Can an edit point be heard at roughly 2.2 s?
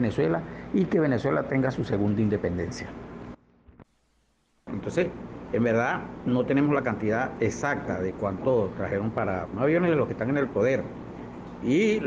no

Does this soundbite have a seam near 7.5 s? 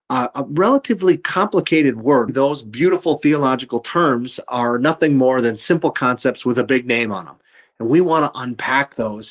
no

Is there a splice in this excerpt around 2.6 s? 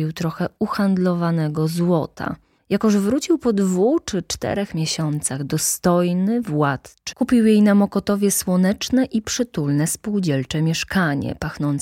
yes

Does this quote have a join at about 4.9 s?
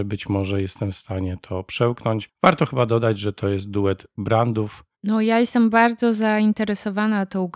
yes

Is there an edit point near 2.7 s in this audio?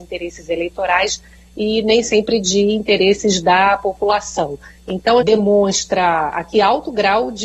no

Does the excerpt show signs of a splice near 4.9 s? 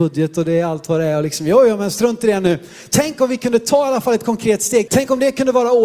yes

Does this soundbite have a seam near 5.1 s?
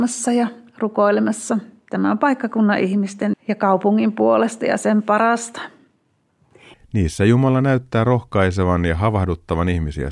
no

